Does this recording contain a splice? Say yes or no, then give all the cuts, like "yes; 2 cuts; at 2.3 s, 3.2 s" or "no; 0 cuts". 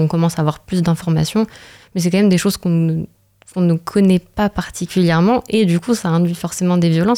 no; 0 cuts